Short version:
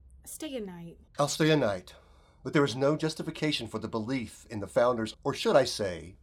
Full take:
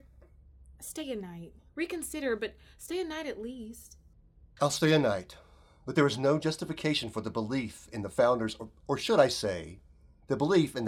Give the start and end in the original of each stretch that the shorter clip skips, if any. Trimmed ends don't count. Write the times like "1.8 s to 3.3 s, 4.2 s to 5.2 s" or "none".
1.6 s to 4.5 s, 8.6 s to 8.8 s